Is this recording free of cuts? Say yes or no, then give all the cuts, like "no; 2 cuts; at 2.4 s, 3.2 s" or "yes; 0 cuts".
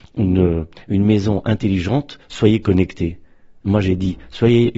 yes; 0 cuts